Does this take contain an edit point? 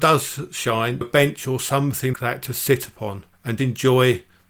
yes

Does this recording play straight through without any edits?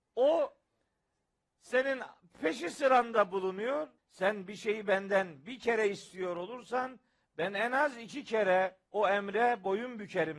no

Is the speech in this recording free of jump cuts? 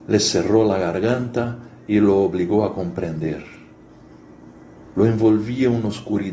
no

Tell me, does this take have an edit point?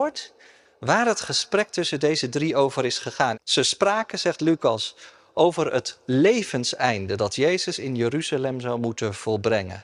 yes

